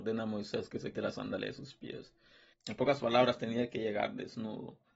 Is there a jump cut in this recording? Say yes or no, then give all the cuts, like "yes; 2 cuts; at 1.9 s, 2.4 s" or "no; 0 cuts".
yes; 2 cuts; at 0.9 s, 2.5 s